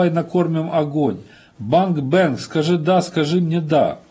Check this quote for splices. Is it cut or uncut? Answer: uncut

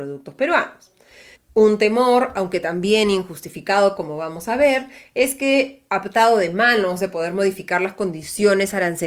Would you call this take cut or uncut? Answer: cut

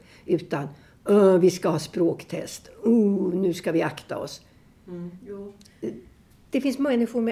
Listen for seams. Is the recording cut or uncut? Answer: uncut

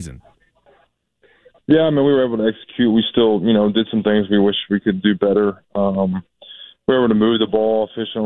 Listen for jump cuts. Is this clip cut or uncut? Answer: uncut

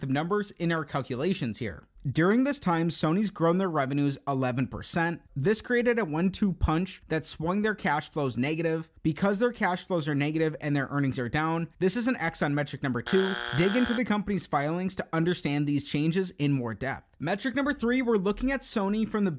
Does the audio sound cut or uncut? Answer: cut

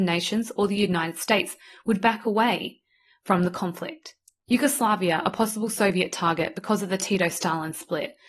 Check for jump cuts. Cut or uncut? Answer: uncut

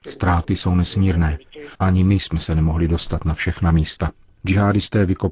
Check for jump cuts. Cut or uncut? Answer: cut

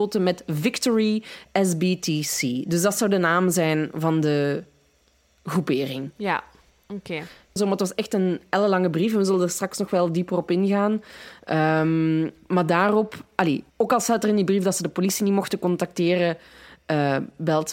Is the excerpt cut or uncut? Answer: cut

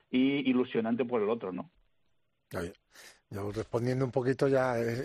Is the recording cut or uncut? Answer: uncut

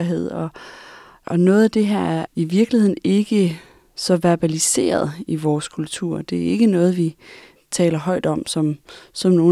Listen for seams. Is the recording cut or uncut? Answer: uncut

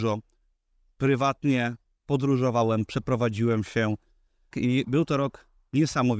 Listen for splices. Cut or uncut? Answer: cut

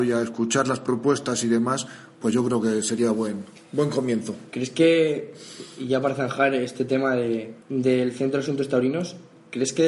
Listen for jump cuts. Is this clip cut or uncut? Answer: cut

